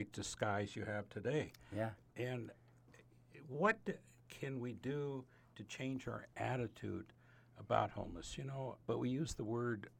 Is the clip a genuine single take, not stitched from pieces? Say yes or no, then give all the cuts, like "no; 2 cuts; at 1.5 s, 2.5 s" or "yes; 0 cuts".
no; 1 cut; at 8.8 s